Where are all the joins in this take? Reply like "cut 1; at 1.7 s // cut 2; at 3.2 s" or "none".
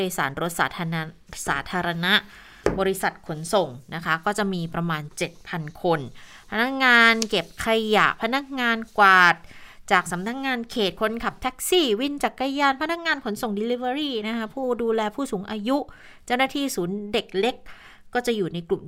none